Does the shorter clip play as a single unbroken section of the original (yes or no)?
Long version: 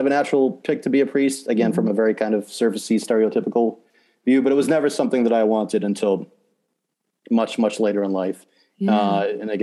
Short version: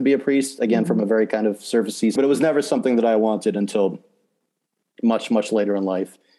no